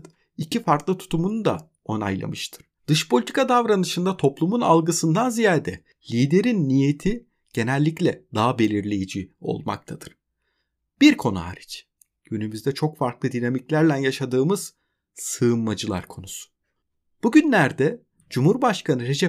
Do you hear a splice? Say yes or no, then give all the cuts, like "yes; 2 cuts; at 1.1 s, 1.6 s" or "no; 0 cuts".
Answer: yes; 1 cut; at 2.8 s